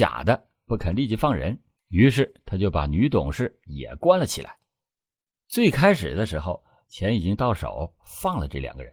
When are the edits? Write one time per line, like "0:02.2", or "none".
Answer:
0:06.9